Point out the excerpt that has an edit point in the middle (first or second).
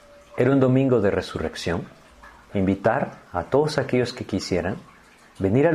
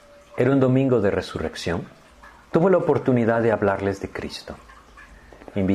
first